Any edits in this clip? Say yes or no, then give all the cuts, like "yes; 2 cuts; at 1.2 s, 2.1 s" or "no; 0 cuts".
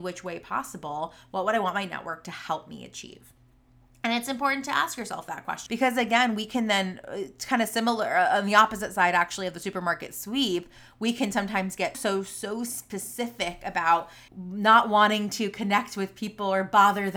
yes; 3 cuts; at 5.7 s, 11.9 s, 14.3 s